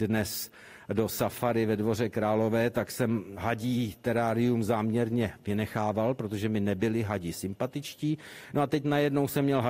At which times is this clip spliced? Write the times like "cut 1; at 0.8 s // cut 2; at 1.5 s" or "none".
none